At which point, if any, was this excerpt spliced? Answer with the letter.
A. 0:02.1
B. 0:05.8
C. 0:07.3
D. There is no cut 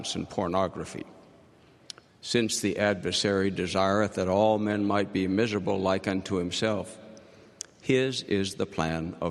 A